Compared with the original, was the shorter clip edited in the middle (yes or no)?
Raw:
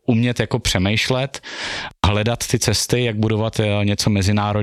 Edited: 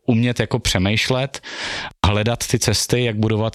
no